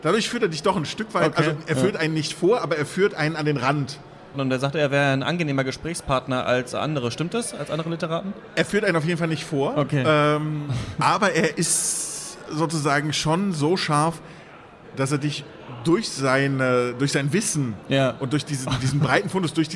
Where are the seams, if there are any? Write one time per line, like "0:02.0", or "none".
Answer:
0:04.3